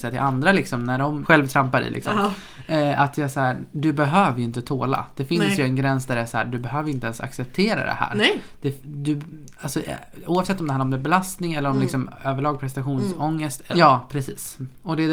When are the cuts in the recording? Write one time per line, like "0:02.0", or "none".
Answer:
0:01.2
0:13.7